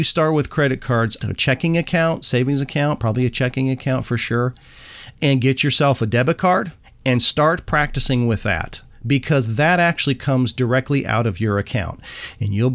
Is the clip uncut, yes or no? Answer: no